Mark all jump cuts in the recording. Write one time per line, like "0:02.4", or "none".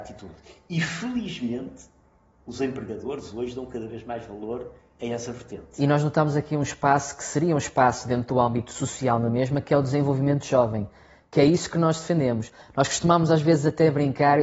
none

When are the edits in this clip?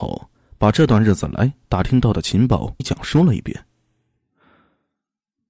0:02.8

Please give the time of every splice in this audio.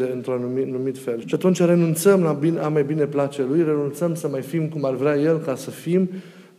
0:01.2

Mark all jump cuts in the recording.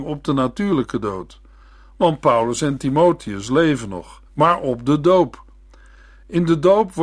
0:04.3

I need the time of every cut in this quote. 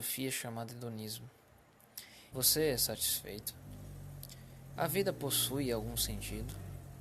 0:02.3
0:04.8

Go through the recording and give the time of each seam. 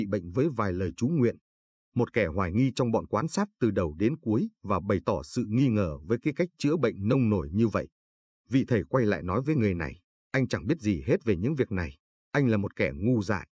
none

